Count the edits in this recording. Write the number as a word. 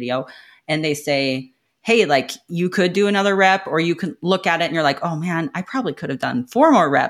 zero